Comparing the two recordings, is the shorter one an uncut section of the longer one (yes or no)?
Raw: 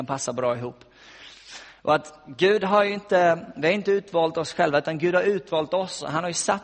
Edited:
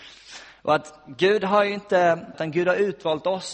no